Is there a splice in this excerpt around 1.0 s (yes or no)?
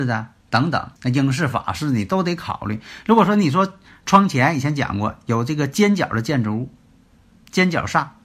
yes